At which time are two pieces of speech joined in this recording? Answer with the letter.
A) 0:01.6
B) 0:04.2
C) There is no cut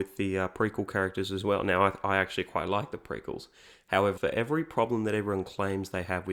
B